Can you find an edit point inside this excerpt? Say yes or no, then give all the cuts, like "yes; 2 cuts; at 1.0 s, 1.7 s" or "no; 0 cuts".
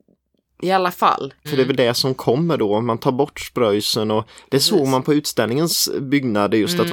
yes; 1 cut; at 1.4 s